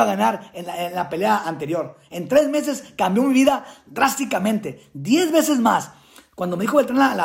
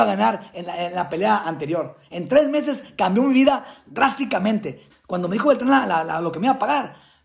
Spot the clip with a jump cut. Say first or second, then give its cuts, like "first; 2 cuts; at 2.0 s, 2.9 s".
second; 1 cut; at 4.9 s